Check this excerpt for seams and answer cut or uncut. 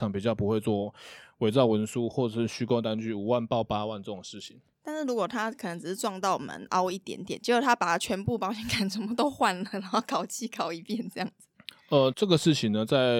cut